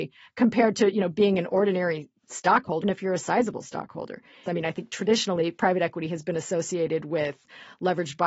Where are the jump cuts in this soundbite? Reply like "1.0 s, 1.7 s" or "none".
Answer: 2.8 s, 4.5 s